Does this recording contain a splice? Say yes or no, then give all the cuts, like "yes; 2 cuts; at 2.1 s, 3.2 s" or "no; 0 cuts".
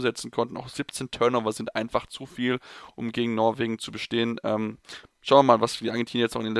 no; 0 cuts